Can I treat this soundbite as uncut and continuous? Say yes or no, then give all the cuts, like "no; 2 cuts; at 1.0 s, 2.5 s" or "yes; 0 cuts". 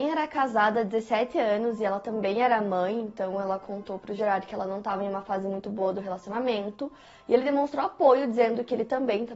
yes; 0 cuts